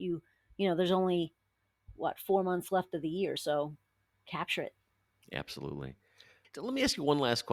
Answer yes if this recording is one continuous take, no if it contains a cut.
yes